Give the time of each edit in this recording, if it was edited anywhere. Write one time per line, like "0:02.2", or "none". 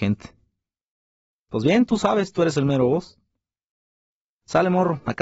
none